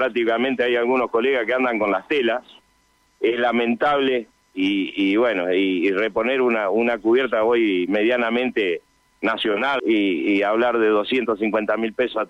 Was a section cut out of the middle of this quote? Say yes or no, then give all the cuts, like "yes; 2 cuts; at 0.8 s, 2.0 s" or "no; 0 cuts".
yes; 1 cut; at 9.8 s